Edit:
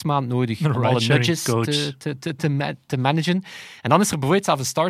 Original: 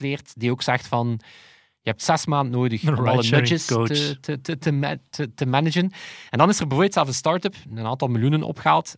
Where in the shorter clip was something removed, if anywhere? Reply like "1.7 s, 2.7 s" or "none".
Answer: 2.9 s